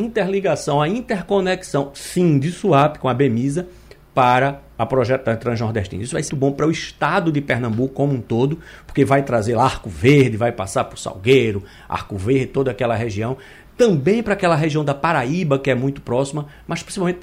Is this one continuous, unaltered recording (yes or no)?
no